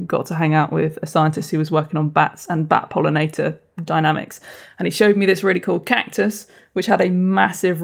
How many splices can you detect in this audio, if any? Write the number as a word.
zero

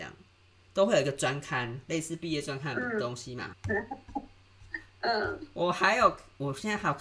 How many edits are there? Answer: one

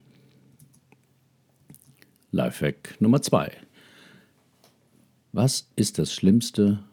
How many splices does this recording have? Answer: zero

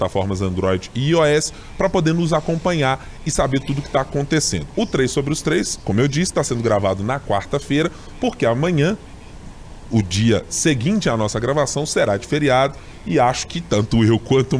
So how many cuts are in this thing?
zero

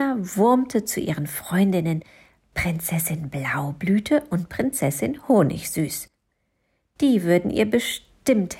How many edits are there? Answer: zero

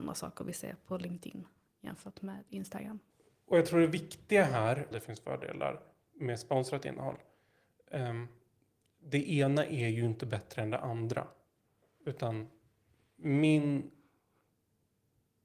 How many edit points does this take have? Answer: one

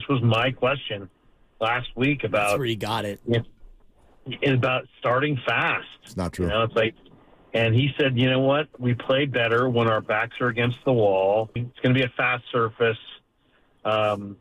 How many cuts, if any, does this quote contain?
one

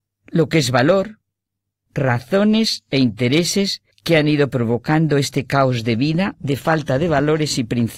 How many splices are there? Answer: two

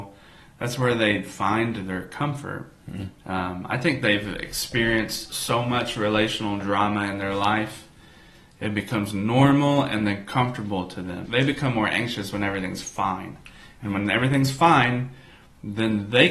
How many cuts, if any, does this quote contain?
one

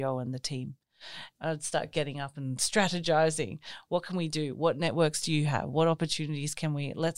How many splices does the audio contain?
one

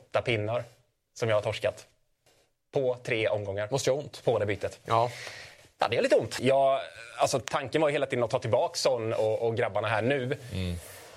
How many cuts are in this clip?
one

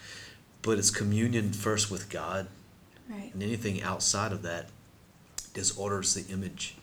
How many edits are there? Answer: one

